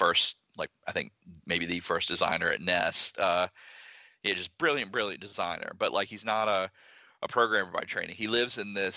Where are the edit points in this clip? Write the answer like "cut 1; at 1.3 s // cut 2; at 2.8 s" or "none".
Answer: none